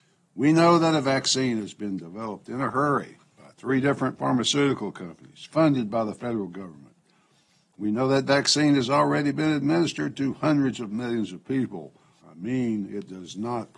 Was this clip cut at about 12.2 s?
yes; 1 cut; at 12.2 s

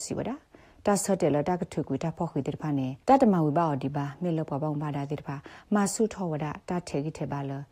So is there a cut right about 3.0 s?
yes; 1 cut; at 3.0 s

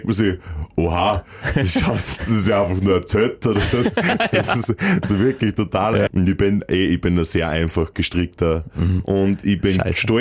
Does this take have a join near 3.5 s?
no; 2 cuts; at 6.1 s, 9.0 s

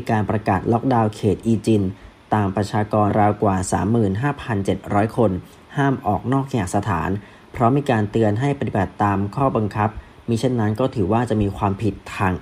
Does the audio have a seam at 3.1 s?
yes; 1 cut; at 3.1 s

